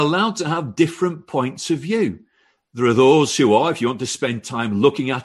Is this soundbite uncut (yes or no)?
yes